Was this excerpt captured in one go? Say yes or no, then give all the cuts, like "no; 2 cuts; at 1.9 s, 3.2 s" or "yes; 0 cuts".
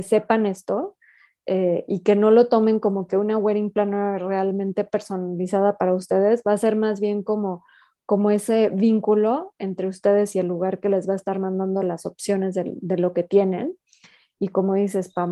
yes; 0 cuts